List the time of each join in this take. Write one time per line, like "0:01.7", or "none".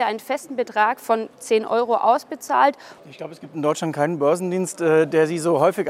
0:03.0